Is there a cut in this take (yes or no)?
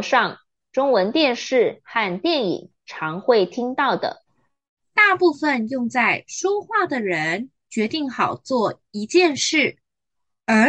yes